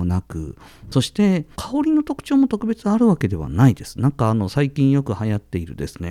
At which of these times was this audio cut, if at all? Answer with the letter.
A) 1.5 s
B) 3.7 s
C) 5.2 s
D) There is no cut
A